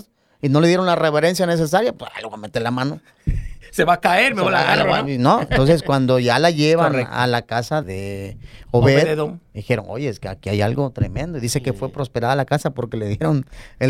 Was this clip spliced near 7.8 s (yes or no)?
yes